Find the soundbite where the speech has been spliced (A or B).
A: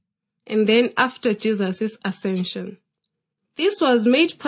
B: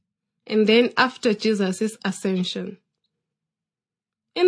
A